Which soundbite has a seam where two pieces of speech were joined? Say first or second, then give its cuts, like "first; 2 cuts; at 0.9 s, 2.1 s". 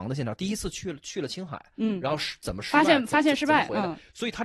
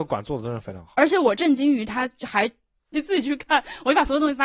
second; 1 cut; at 2.9 s